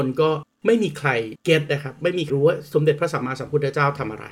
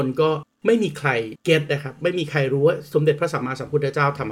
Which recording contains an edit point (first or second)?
first